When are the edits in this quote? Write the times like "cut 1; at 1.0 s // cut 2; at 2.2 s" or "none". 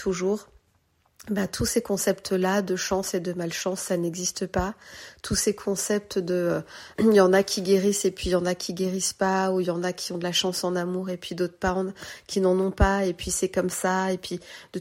cut 1; at 7.0 s